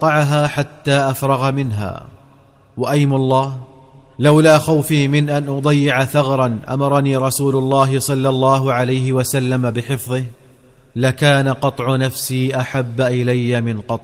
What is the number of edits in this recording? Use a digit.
0